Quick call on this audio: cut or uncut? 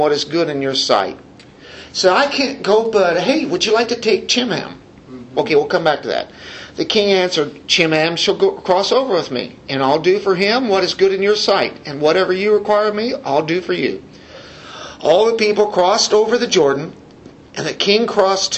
uncut